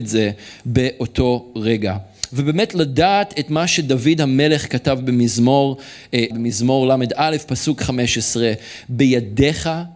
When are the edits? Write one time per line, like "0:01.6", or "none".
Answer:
0:06.3